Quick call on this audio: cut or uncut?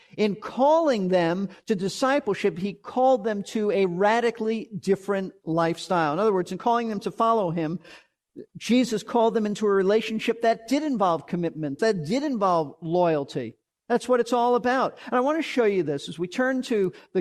cut